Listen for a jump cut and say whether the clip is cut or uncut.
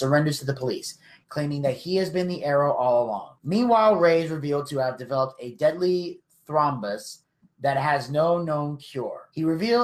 uncut